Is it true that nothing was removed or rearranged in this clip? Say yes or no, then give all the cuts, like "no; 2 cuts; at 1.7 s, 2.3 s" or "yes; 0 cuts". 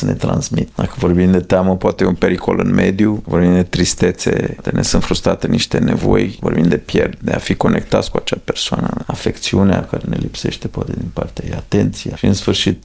yes; 0 cuts